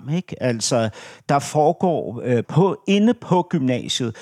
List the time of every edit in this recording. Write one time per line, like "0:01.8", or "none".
0:02.4